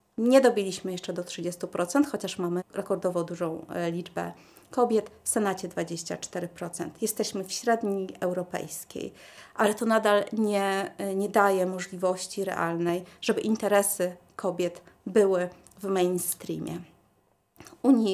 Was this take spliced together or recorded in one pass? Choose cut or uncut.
uncut